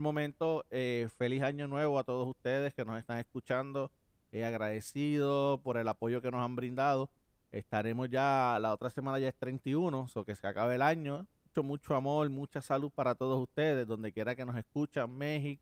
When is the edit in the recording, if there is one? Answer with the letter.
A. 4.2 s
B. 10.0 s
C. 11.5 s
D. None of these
C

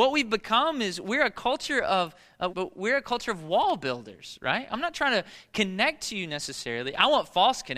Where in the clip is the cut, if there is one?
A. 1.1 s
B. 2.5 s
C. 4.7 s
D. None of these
B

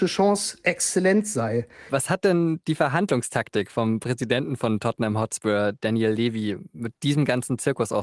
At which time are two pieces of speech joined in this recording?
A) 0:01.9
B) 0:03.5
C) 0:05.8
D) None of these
A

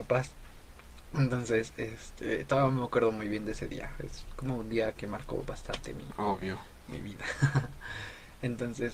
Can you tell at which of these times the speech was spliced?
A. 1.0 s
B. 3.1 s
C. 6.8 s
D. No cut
D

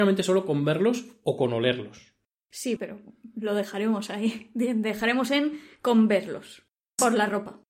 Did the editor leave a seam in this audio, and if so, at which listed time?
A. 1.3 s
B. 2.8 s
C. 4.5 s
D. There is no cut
B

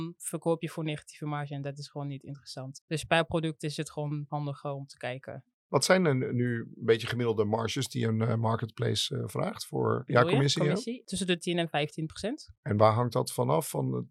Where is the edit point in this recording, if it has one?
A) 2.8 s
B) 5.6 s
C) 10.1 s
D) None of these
C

